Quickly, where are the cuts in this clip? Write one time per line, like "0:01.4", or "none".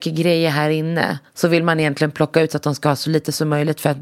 0:01.3